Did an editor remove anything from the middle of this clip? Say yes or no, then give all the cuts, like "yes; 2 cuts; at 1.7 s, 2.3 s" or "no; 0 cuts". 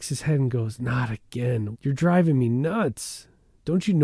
yes; 1 cut; at 1.7 s